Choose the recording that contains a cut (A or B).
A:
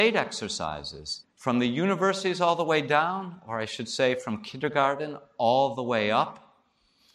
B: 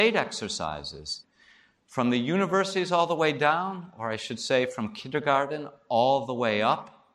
A